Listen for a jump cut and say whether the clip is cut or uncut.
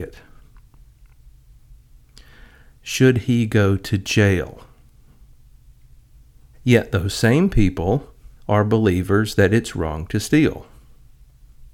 cut